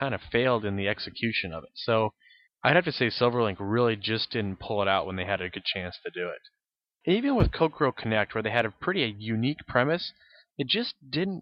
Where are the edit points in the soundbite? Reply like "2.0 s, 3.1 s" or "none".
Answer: 7.0 s